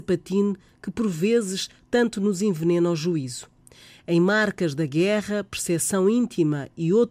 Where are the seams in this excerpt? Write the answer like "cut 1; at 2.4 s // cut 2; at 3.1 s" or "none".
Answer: none